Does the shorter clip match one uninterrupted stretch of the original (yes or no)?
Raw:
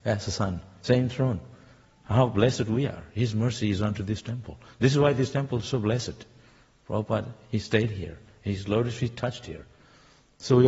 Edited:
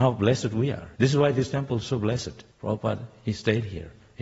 no